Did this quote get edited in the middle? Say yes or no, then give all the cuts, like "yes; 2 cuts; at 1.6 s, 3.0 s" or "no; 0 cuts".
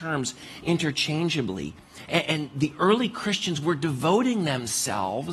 no; 0 cuts